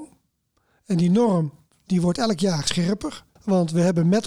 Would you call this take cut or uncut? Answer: cut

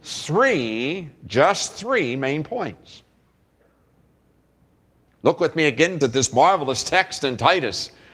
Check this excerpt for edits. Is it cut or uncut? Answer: cut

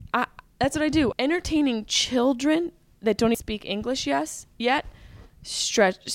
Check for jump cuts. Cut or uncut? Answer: cut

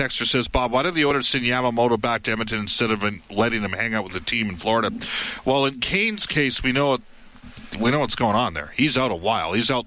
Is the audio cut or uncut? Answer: uncut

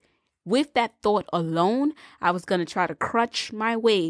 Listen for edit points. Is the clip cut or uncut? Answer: uncut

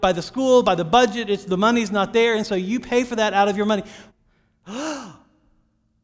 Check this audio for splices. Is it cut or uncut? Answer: cut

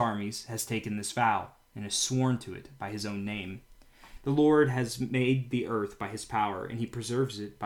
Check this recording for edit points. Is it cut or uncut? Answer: cut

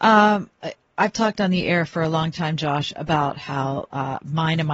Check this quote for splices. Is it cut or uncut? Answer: uncut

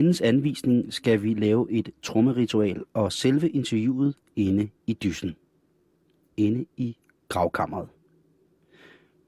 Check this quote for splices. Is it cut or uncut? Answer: uncut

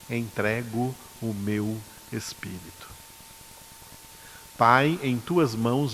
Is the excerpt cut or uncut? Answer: uncut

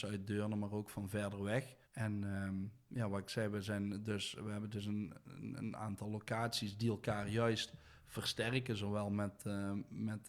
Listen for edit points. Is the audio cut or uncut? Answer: cut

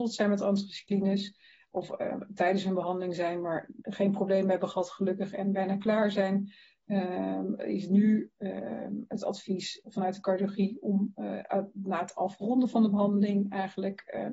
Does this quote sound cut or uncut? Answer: uncut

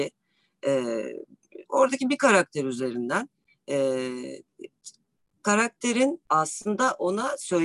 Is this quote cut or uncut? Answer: cut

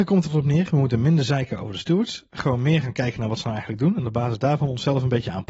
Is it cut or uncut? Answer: uncut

